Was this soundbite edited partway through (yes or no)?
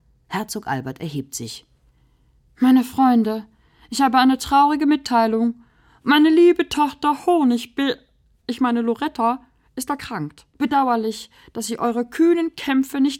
yes